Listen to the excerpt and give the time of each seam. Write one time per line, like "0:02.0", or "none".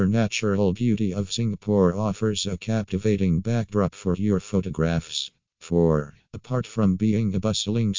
0:06.2